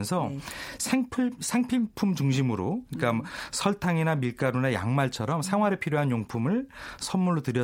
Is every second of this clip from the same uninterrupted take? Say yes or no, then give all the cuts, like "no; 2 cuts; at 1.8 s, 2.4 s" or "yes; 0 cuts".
yes; 0 cuts